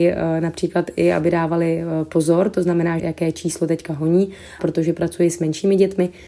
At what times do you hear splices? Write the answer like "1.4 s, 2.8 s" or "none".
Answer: 3.0 s, 4.6 s